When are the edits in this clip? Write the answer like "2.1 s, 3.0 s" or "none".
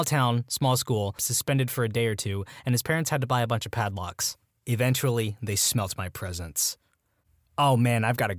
1.2 s, 4.5 s